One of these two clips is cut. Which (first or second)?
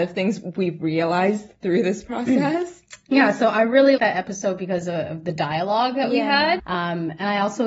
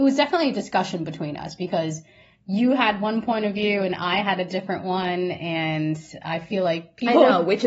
first